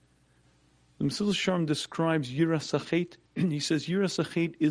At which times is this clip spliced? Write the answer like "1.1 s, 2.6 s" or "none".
3.3 s